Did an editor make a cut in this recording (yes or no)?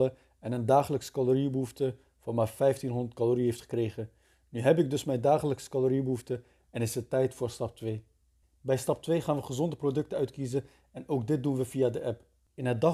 no